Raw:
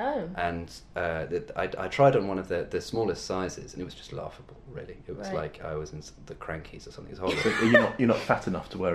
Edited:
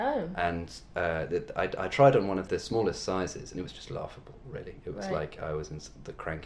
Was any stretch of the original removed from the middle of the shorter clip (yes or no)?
yes